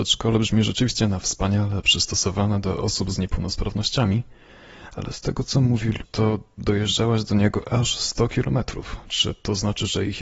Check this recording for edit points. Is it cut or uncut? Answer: cut